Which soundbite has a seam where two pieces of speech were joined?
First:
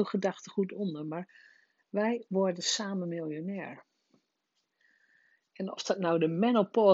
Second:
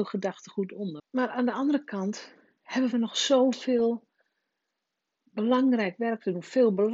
second; 1 cut; at 1.0 s

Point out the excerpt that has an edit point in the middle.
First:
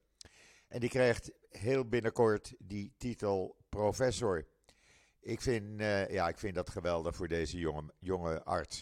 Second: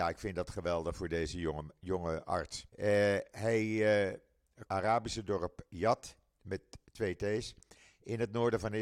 second; 2 cuts; at 2.7 s, 4.7 s

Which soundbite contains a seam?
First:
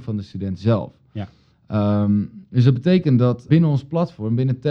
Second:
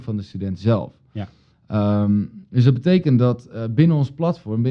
first; 1 cut; at 3.5 s

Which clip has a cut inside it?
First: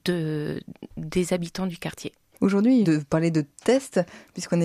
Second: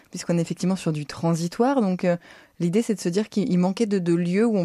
first; 1 cut; at 2.8 s

